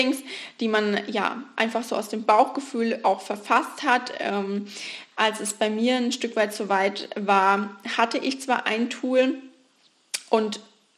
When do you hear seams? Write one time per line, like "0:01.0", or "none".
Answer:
0:05.1